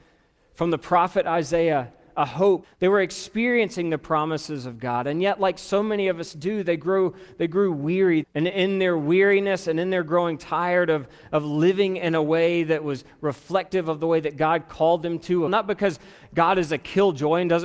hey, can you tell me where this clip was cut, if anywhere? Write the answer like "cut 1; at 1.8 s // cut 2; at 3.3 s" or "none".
cut 1; at 2.6 s // cut 2; at 8.2 s // cut 3; at 15.5 s